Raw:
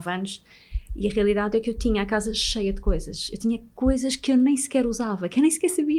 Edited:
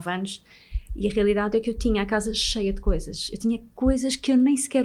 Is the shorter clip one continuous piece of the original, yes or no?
yes